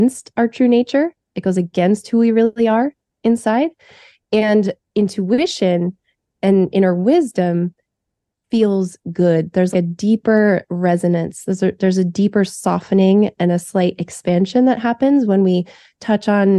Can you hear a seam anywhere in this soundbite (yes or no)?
yes